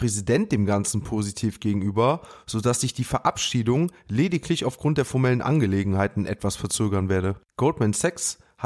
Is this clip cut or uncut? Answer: cut